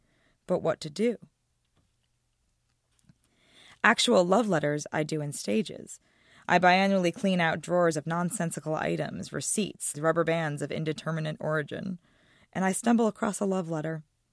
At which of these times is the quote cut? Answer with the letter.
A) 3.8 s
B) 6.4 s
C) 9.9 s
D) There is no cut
C